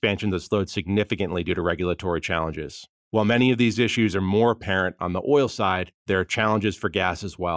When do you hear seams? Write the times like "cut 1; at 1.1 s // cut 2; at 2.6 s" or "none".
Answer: none